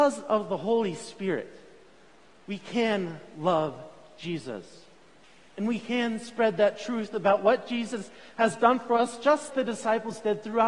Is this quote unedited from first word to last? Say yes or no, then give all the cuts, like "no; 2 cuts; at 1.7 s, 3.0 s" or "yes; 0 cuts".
no; 1 cut; at 9.5 s